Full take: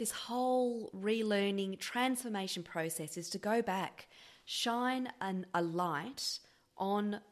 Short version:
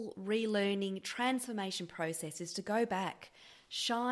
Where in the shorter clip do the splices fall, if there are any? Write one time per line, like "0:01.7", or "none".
none